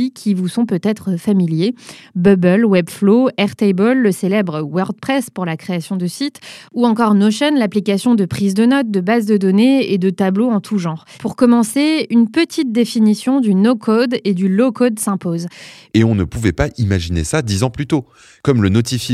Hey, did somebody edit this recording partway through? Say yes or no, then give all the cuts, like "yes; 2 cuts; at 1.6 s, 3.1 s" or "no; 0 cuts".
yes; 2 cuts; at 11.1 s, 15.9 s